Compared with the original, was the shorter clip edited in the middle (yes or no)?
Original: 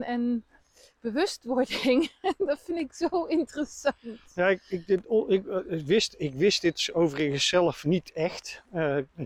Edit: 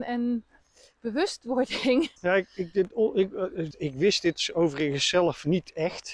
yes